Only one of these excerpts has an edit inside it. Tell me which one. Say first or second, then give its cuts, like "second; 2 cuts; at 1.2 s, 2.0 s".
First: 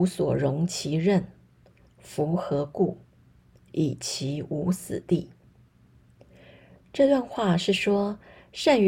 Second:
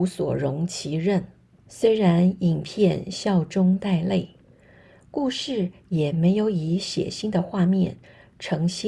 second; 1 cut; at 1.5 s